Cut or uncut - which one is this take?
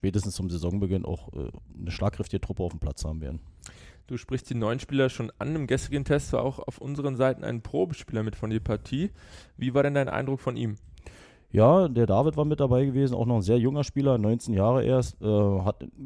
uncut